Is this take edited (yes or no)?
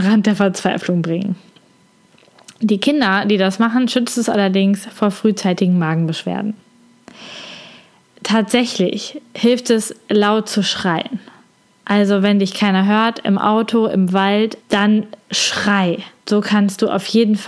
yes